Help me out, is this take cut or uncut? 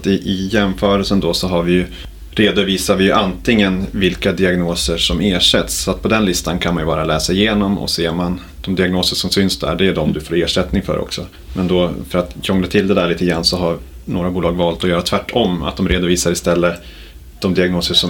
uncut